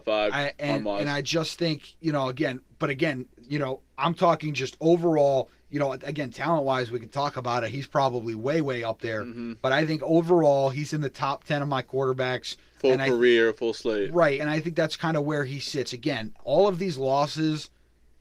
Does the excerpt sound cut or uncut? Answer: uncut